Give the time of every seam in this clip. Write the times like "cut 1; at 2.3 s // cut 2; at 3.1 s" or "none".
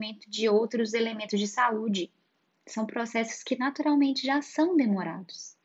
none